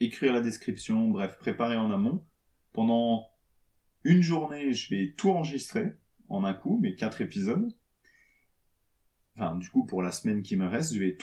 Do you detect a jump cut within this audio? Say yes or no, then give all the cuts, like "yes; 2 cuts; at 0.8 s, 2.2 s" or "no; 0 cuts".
no; 0 cuts